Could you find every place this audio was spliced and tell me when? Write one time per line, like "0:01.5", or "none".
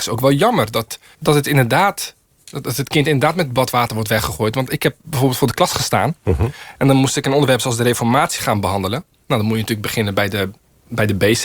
0:01.1